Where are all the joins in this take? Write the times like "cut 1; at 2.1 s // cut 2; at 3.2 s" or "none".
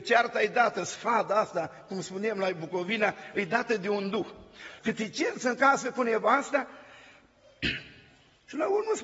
cut 1; at 4.8 s